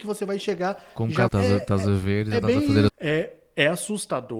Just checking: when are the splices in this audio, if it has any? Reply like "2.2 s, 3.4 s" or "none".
1.3 s, 2.9 s